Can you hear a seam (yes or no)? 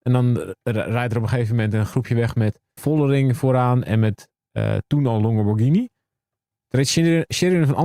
yes